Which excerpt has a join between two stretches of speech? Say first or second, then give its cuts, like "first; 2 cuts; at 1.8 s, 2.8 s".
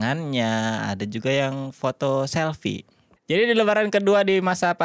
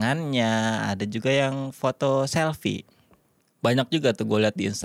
first; 1 cut; at 3.2 s